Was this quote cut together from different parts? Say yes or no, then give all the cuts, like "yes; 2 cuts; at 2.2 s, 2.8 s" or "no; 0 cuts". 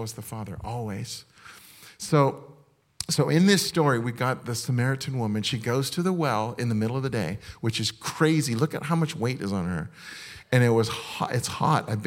no; 0 cuts